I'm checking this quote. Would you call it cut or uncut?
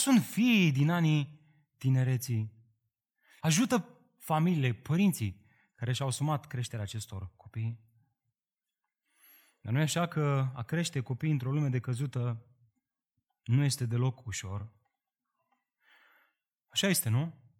cut